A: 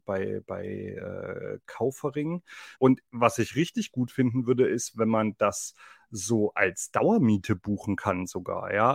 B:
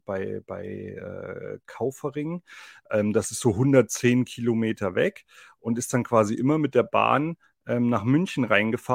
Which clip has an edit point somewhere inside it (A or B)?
A